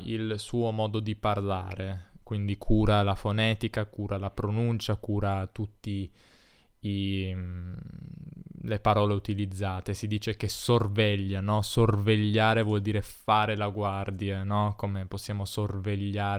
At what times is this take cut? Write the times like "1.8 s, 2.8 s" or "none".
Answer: none

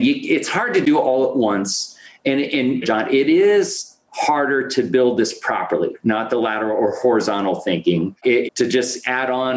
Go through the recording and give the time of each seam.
2.8 s, 6.0 s, 8.5 s

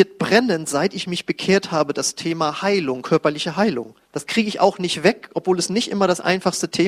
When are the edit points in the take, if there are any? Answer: 4.0 s

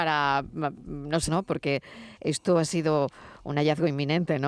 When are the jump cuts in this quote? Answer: 1.3 s

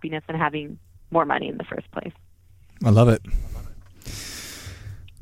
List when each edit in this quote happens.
none

